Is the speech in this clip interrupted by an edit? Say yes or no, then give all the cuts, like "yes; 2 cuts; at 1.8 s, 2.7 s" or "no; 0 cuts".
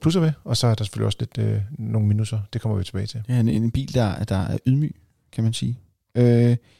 no; 0 cuts